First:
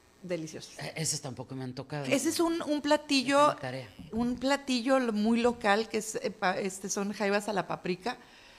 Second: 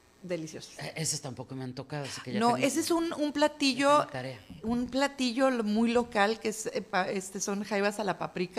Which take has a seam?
first; 1 cut; at 2.1 s

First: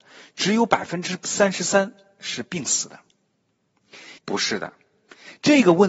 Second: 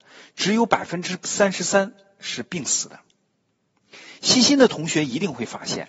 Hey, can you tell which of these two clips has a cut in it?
first; 1 cut; at 4.2 s

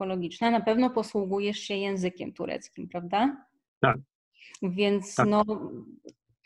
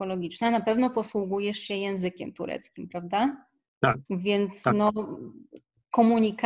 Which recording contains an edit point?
second; 1 cut; at 4.1 s

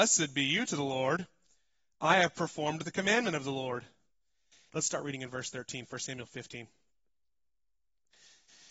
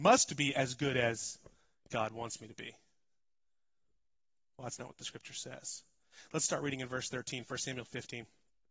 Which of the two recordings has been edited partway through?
first; 1 cut; at 4.7 s

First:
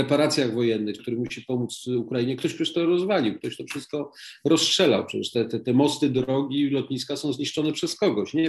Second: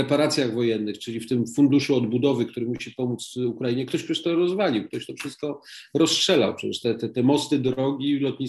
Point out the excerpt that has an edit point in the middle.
first; 1 cut; at 1.0 s

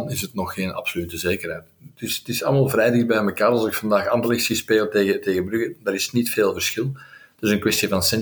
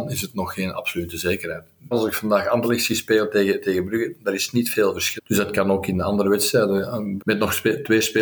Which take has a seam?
second; 3 cuts; at 1.9 s, 5.2 s, 7.2 s

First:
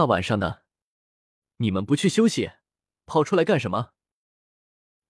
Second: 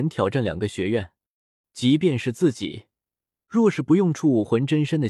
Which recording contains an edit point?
second; 1 cut; at 1.6 s

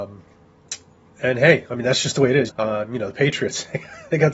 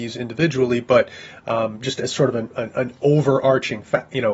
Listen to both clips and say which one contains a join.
first; 1 cut; at 2.5 s

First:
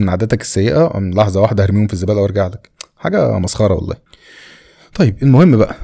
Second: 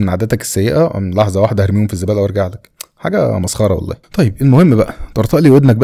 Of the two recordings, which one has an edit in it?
second; 1 cut; at 4.0 s

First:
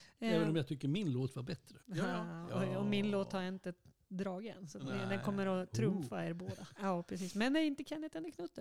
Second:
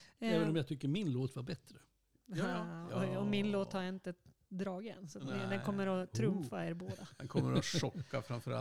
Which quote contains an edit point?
first; 2 cuts; at 1.8 s, 6.7 s

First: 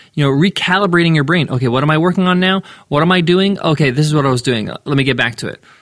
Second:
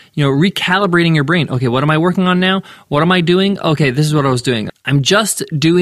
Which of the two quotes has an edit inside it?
second; 1 cut; at 4.7 s

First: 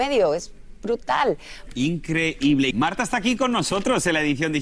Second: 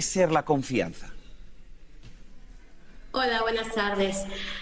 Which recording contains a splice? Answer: first; 2 cuts; at 1.7 s, 2.7 s

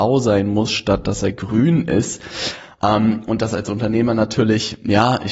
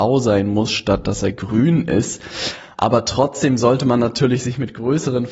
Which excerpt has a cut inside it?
second; 1 cut; at 2.7 s

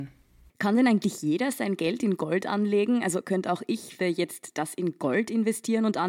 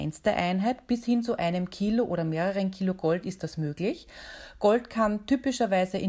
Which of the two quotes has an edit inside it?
first; 1 cut; at 4.0 s

